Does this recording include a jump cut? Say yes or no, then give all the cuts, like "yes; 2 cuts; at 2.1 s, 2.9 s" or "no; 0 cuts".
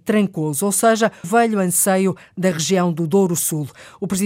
yes; 1 cut; at 1.2 s